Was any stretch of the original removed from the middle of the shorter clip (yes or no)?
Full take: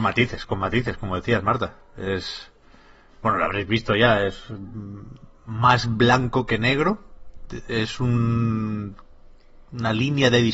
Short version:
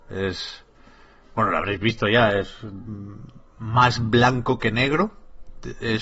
no